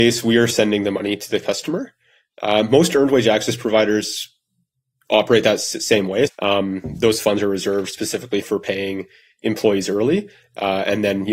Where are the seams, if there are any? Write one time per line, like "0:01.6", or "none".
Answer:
0:06.3
0:08.4